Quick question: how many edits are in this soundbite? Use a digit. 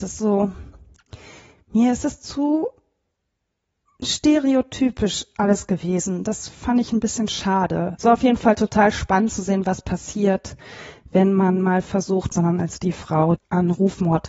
3